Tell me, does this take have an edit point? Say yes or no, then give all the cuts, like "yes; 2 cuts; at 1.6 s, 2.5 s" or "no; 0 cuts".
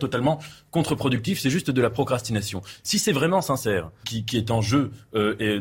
yes; 1 cut; at 4.0 s